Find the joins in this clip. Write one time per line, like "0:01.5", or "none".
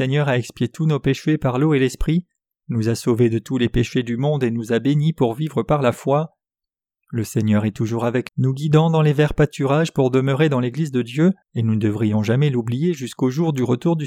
0:08.3
0:11.4